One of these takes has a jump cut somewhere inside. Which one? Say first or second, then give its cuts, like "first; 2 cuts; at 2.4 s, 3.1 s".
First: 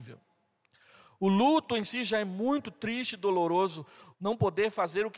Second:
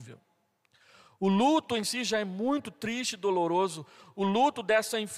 first; 1 cut; at 4.1 s